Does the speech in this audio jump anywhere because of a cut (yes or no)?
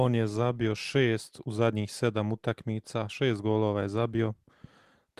no